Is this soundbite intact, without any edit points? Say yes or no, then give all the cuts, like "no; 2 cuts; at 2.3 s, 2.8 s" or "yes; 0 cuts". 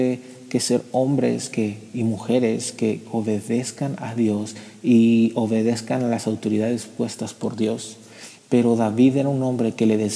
no; 2 cuts; at 3.1 s, 8.4 s